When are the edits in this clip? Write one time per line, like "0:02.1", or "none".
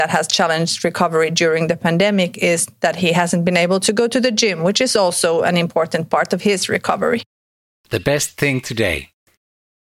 none